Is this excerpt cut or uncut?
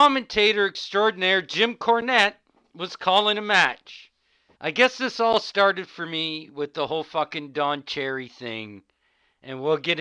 cut